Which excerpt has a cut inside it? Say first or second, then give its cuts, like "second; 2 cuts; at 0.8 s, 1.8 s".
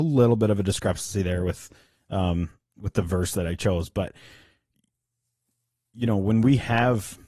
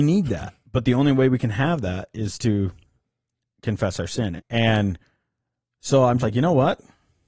second; 2 cuts; at 4.4 s, 6.2 s